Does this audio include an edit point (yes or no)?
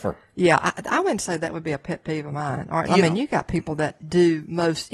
yes